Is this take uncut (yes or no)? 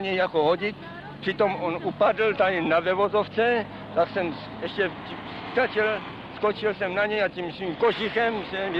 yes